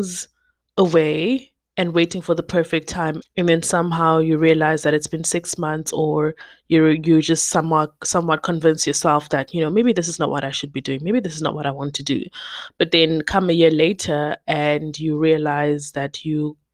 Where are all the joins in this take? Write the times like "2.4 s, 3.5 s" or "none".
3.2 s